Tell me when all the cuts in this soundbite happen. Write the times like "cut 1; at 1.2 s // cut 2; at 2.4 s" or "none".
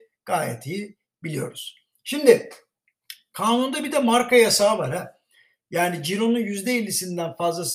none